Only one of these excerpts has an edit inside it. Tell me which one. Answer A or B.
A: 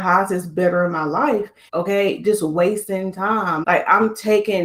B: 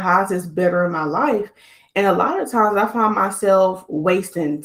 A